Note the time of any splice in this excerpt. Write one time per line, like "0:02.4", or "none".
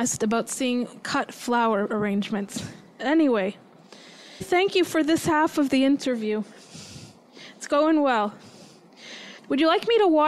0:04.4
0:09.4